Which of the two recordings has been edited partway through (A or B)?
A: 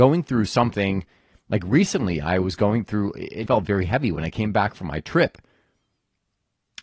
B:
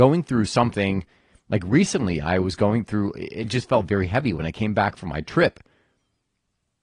A